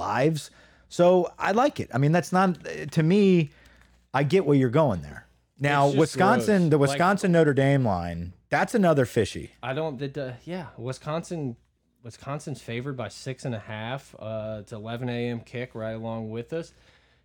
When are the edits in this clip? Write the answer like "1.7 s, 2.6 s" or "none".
10.0 s

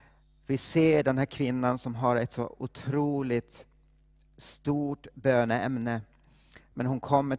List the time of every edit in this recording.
none

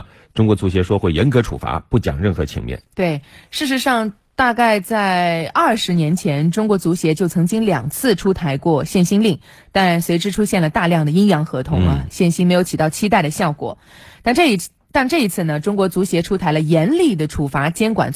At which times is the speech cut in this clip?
none

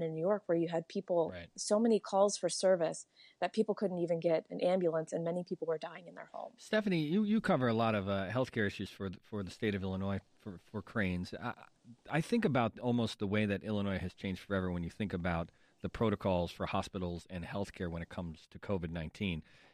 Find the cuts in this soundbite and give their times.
none

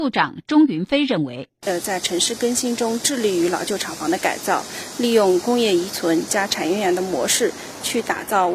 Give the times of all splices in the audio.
none

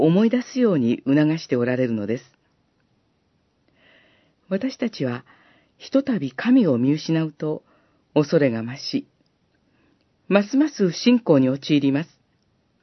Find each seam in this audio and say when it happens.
none

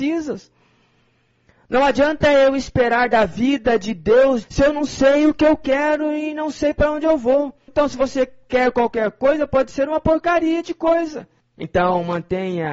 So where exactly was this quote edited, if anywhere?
4.4 s, 7.7 s, 11.4 s

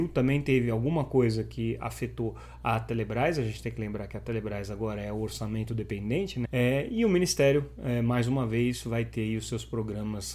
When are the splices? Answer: 6.5 s

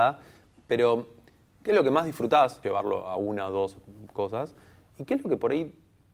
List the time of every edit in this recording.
2.6 s

